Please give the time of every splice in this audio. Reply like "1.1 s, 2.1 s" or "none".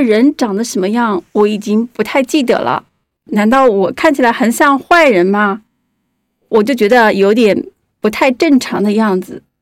3.2 s